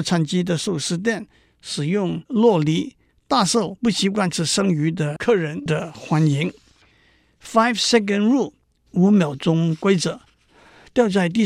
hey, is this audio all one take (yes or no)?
no